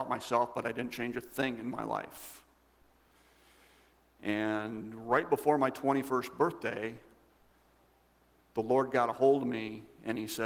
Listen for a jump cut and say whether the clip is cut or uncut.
uncut